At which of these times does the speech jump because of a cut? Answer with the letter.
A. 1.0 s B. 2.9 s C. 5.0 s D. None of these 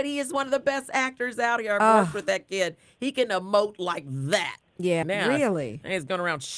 C